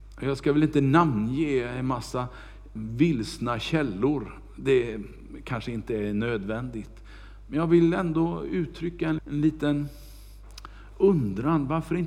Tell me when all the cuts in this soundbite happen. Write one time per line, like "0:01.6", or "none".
0:02.8
0:09.2